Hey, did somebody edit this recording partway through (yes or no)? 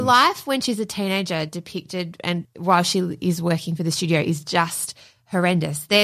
no